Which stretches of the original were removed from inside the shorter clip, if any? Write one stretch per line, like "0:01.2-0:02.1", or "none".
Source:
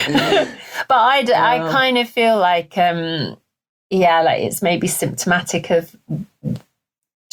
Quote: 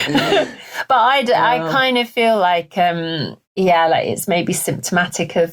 0:03.4-0:03.8